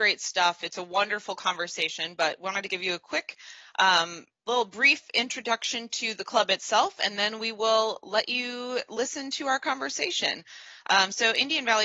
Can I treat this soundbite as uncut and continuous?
yes; 0 cuts

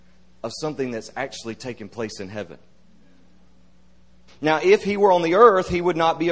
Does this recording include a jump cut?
yes; 1 cut; at 4.3 s

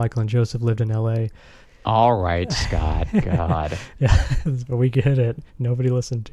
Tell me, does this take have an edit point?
yes; 1 cut; at 1.6 s

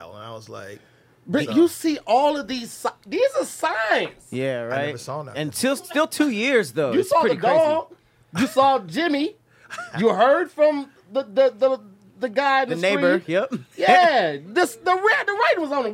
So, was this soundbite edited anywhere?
no; 0 cuts

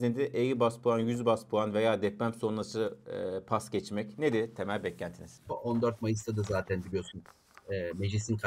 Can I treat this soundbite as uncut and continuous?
no; 1 cut; at 5.5 s

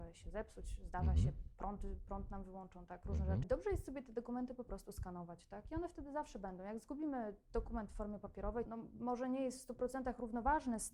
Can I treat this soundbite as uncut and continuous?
no; 2 cuts; at 3.4 s, 8.7 s

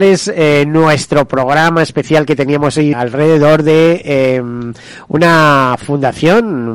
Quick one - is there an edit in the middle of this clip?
yes; 1 cut; at 2.9 s

